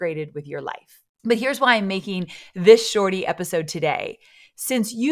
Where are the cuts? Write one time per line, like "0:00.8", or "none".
0:01.2